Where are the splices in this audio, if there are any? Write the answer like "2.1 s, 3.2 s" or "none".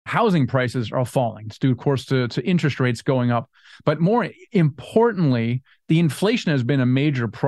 none